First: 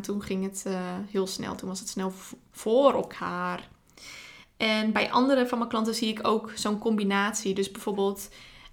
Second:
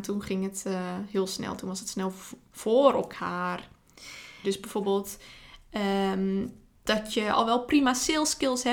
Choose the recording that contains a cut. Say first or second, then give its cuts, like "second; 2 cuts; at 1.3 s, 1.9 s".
second; 1 cut; at 4.4 s